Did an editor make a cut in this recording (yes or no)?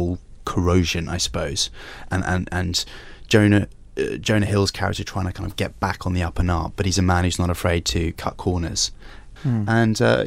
yes